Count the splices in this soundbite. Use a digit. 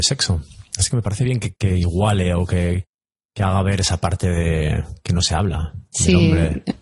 1